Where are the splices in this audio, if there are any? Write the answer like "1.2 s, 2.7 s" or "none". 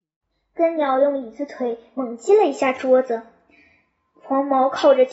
none

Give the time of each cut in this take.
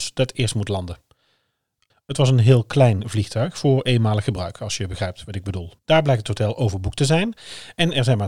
1.9 s, 5.8 s

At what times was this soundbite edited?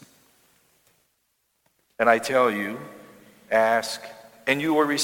none

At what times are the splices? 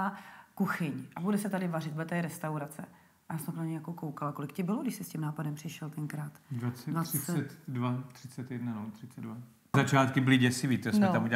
9.7 s

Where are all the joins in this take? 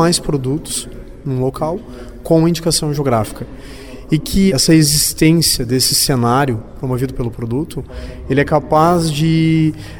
4.5 s

